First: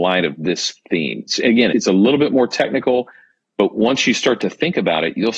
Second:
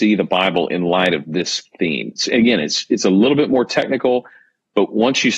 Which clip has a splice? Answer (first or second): first